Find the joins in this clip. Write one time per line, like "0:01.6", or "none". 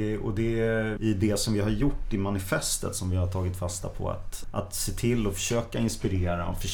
0:01.0
0:04.4